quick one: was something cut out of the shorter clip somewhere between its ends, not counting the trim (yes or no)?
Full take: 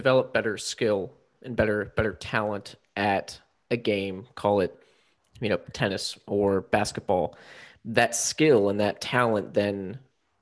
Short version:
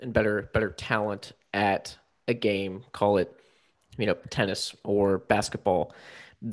no